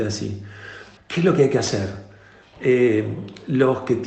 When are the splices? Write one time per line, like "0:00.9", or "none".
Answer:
0:01.0
0:02.5